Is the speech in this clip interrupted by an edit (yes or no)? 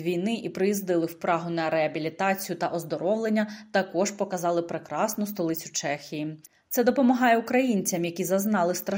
no